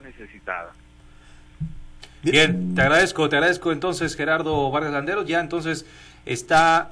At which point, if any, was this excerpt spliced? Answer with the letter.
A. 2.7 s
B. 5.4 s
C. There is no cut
C